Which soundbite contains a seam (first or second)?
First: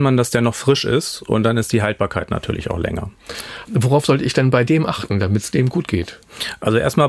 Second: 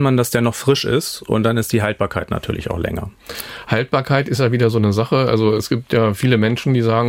first